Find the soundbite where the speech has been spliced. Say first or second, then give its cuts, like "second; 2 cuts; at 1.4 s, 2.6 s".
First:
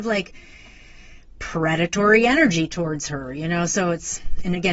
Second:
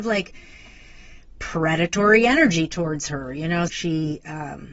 second; 1 cut; at 3.7 s